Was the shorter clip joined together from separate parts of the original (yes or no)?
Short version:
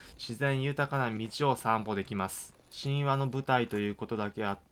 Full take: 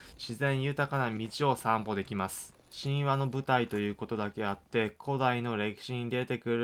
no